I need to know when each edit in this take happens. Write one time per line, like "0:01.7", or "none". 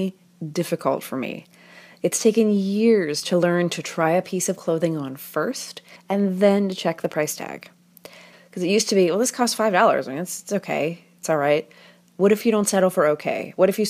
0:06.0
0:08.3